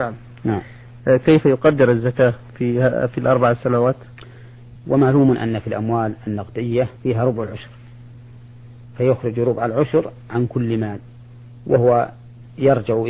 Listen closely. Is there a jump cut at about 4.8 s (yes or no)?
yes